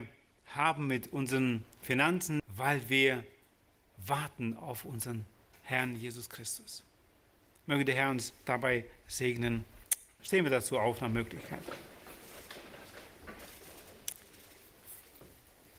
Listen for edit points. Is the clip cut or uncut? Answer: cut